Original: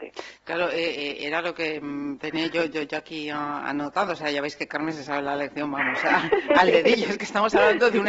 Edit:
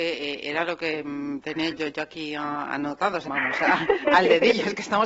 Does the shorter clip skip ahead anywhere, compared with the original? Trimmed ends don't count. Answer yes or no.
yes